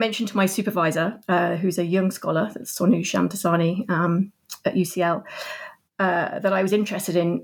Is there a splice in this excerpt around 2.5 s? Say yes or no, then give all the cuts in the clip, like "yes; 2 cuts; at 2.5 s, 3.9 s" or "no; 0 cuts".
no; 0 cuts